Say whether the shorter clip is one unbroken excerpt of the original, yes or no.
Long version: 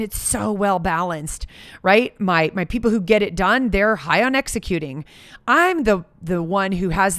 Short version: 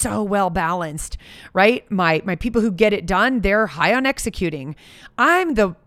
yes